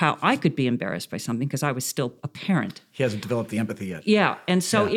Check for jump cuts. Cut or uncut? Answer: uncut